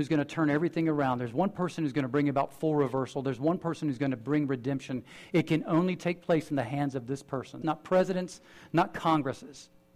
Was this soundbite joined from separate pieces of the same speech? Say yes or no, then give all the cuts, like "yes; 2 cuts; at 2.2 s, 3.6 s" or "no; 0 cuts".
yes; 1 cut; at 7.6 s